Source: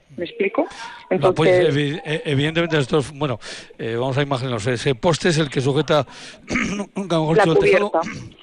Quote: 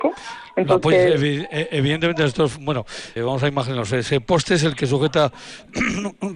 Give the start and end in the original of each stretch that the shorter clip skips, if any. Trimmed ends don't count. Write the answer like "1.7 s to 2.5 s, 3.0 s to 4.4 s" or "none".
3.7 s to 3.9 s